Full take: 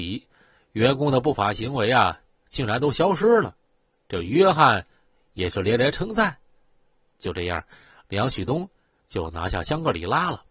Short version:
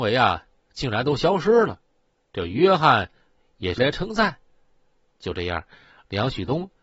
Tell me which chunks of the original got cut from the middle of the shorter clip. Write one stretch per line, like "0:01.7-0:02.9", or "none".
0:05.5-0:05.8